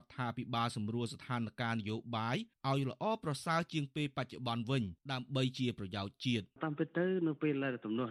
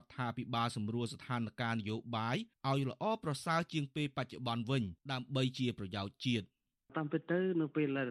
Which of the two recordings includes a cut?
first; 1 cut; at 6.5 s

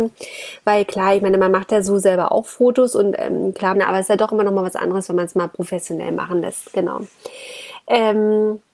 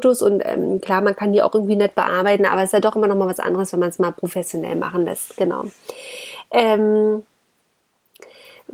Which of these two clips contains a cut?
first; 1 cut; at 3.7 s

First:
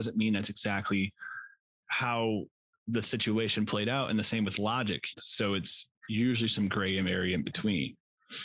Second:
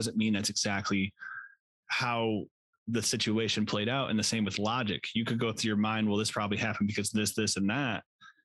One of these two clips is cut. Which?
first; 1 cut; at 5.1 s

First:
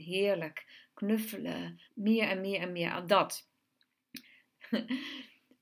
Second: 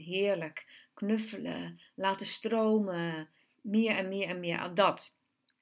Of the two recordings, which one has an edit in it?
first; 2 cuts; at 1.9 s, 4.4 s

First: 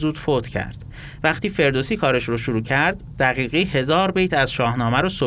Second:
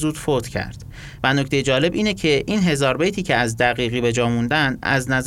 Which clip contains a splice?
second; 1 cut; at 1.2 s

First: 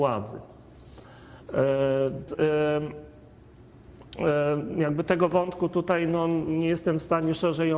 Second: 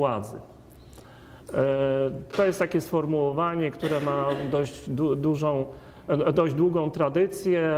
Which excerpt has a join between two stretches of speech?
first; 1 cut; at 2.3 s

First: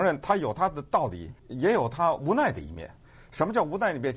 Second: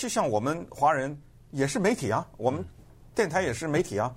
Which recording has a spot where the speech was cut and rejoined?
first; 1 cut; at 1.4 s

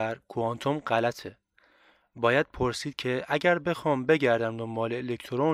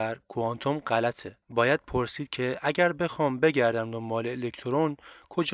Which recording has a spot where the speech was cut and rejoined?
second; 1 cut; at 1.4 s

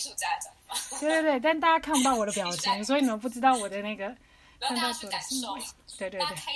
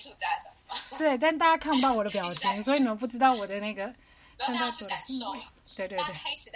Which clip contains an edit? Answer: second; 1 cut; at 1.0 s

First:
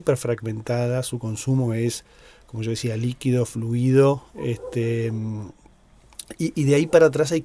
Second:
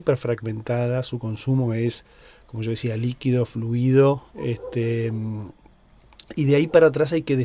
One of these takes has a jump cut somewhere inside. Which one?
second; 1 cut; at 6.3 s

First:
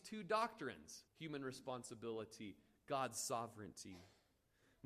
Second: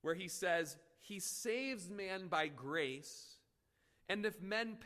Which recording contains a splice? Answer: first; 1 cut; at 1.1 s

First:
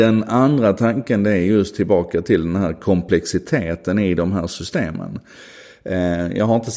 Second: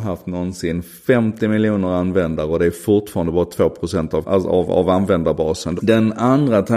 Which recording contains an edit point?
second; 2 cuts; at 4.2 s, 5.8 s

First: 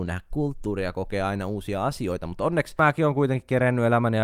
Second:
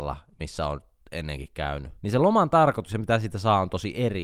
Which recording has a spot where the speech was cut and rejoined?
second; 1 cut; at 2.0 s

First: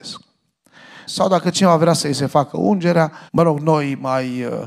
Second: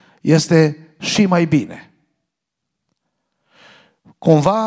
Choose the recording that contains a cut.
first; 2 cuts; at 1.1 s, 3.3 s

